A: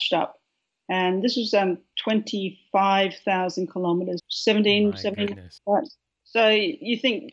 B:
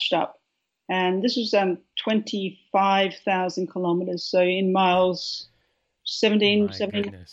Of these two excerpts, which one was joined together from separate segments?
A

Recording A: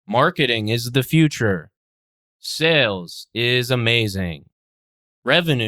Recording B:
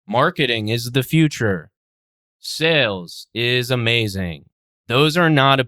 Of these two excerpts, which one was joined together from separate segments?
B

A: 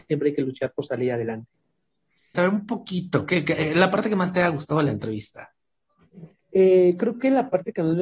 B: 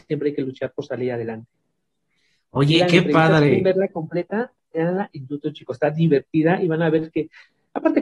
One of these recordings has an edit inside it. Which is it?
A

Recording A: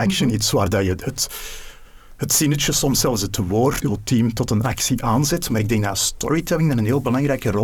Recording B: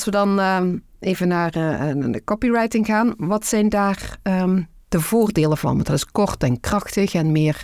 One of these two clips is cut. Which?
A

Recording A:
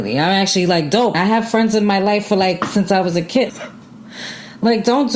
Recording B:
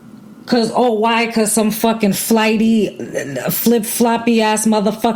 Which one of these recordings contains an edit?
A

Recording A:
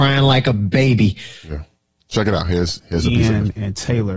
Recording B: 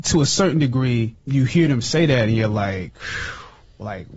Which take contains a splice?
B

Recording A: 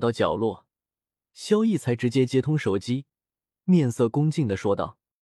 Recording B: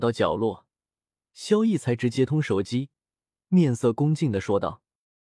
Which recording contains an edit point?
B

